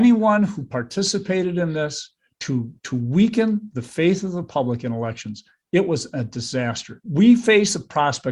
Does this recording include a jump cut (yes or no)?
yes